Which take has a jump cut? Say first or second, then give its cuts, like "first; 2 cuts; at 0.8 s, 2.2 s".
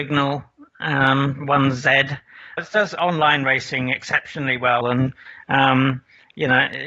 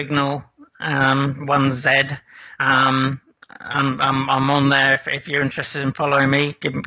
first; 2 cuts; at 2.6 s, 4.8 s